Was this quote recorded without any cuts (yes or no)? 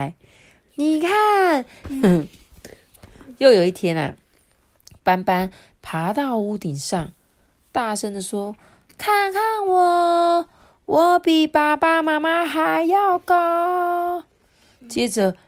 no